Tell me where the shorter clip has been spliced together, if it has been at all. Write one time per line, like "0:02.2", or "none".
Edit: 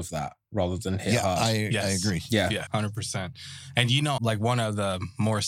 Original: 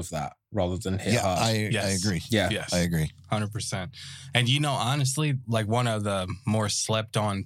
0:02.7
0:04.2